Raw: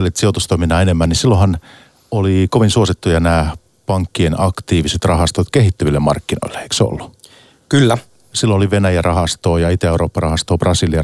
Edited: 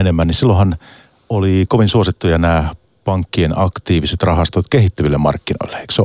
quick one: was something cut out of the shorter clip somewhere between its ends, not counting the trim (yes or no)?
no